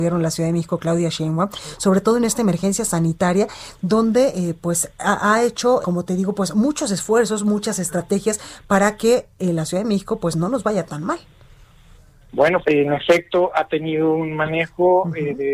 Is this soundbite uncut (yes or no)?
no